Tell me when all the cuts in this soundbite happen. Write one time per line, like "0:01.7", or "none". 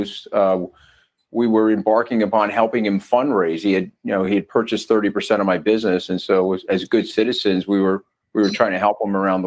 none